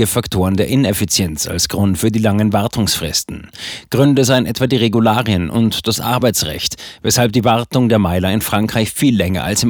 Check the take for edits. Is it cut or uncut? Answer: uncut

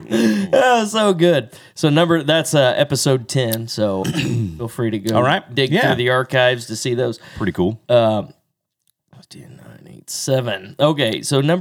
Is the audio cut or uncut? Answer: cut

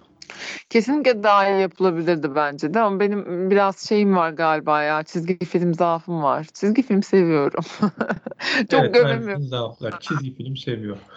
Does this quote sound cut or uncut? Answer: uncut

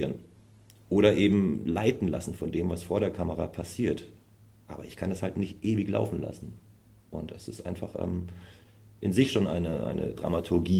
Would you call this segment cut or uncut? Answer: uncut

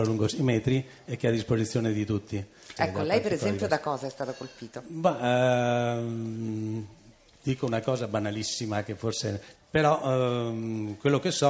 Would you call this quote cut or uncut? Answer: cut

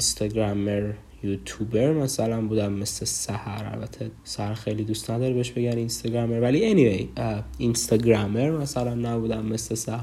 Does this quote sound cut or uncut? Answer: cut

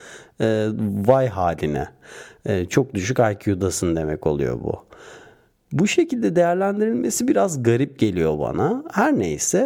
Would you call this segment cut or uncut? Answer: uncut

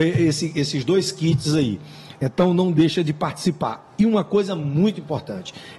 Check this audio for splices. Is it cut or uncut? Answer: uncut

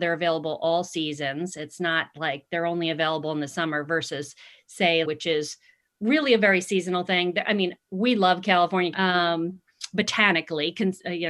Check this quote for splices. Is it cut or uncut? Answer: cut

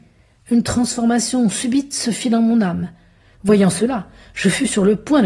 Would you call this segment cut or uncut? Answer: cut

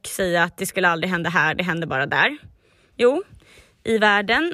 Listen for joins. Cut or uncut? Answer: cut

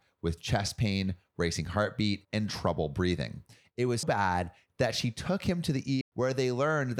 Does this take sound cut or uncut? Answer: cut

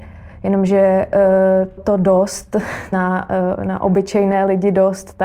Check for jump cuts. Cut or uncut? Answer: cut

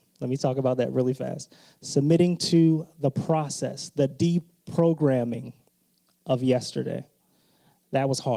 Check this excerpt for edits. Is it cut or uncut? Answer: uncut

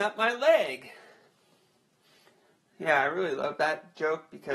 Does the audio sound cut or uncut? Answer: uncut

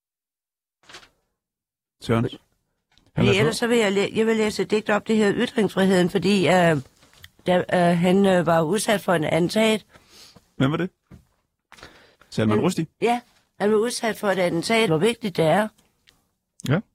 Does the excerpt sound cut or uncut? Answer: cut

